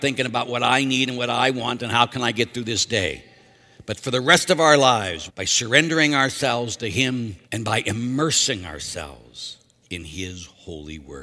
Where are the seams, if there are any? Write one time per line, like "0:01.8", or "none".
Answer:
0:05.3
0:07.4